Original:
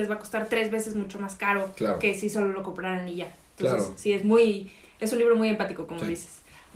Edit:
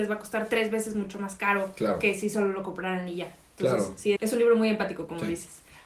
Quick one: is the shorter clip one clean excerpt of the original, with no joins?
no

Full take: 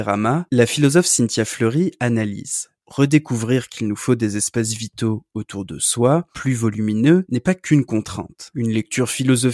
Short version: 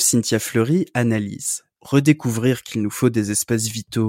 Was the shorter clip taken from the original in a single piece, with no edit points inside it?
yes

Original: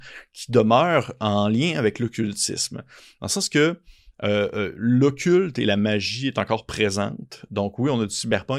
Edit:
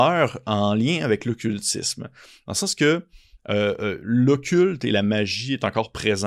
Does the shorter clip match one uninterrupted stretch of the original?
yes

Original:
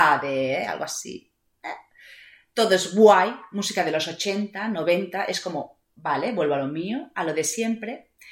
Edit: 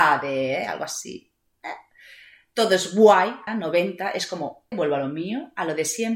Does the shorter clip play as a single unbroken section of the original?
no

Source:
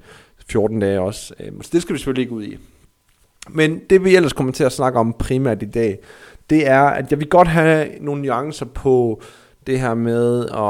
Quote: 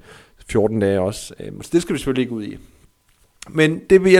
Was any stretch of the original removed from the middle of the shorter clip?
no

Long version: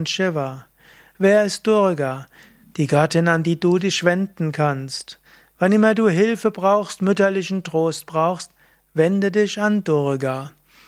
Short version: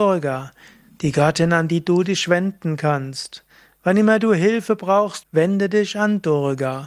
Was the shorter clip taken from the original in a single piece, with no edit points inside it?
no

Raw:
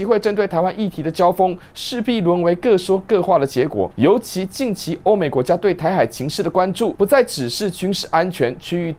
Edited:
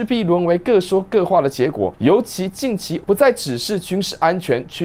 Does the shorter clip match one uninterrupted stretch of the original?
no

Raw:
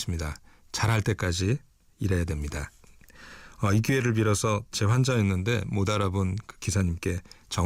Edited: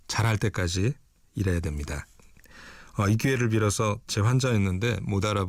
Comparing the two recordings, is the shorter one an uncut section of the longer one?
yes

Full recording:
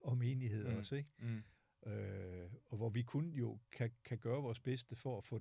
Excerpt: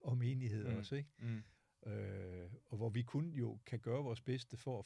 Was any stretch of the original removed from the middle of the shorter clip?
yes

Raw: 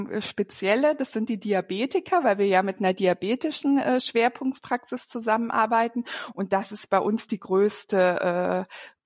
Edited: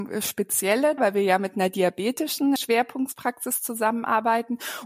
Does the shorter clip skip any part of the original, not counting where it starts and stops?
yes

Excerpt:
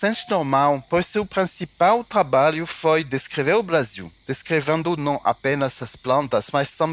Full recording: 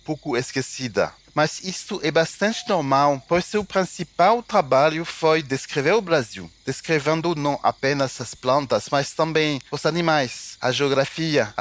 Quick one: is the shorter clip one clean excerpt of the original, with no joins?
yes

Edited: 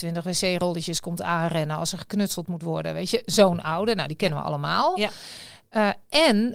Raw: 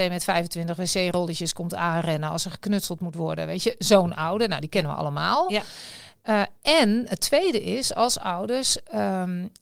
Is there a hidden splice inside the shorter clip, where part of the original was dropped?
no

